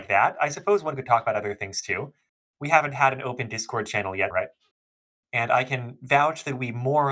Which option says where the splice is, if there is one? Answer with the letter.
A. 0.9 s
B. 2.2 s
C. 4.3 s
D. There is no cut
C